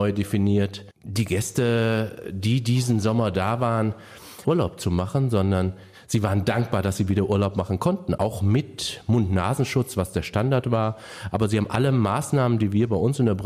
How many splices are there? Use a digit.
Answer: 1